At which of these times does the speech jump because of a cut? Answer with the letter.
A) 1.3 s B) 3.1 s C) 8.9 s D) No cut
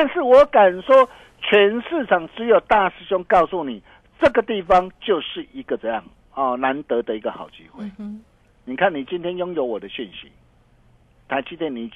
D